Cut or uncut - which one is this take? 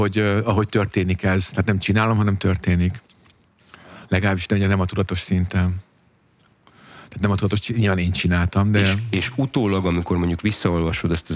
uncut